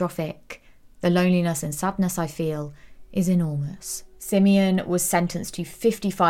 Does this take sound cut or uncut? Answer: uncut